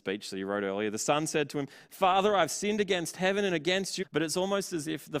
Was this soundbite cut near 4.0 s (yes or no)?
yes